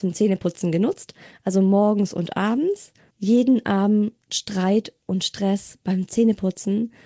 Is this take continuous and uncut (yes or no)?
no